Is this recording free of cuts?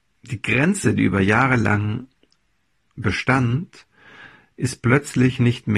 yes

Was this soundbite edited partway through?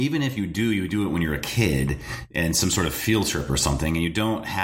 no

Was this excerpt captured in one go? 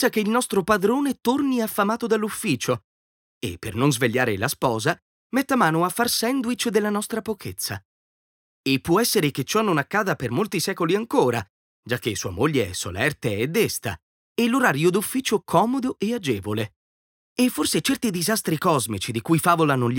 no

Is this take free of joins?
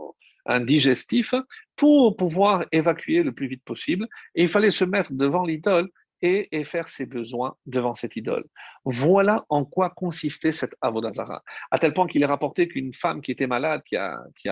yes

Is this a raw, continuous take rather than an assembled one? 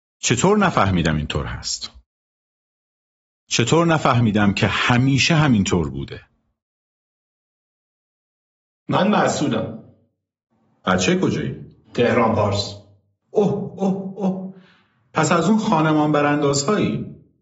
no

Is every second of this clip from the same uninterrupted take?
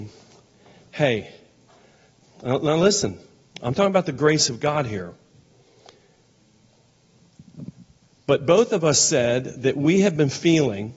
yes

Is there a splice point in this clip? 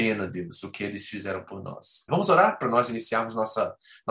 yes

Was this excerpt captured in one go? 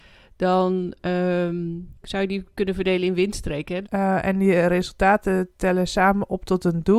no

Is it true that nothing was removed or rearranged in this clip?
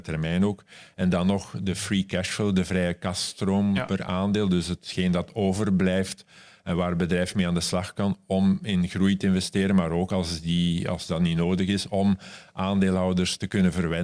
yes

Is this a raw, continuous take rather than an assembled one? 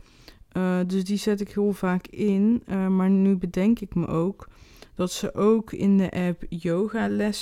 yes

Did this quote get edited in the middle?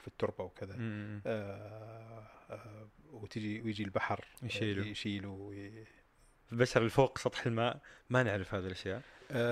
yes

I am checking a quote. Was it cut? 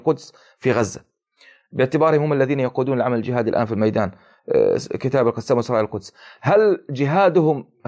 no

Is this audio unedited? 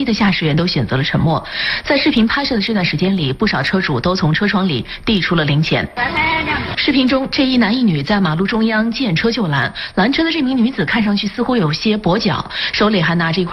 no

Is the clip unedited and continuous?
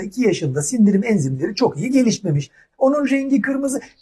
no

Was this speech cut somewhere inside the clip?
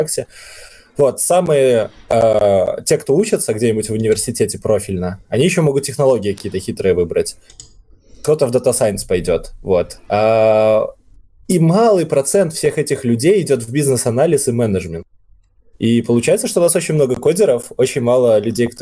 no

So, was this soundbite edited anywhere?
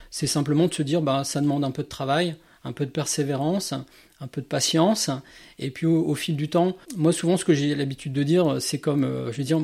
yes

